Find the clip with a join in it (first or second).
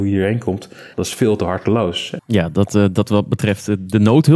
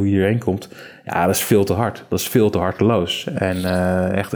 first